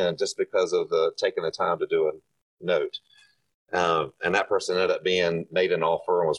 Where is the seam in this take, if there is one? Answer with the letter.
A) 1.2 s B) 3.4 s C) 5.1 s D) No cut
D